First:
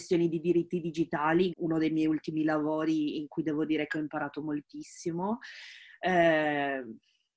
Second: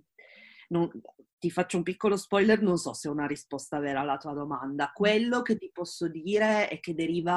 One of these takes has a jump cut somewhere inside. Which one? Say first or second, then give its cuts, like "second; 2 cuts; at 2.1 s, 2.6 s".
first; 1 cut; at 1.5 s